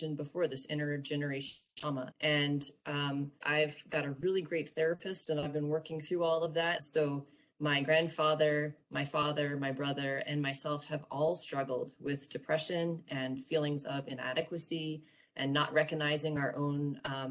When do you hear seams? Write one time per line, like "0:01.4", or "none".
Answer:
0:02.1
0:03.4
0:06.8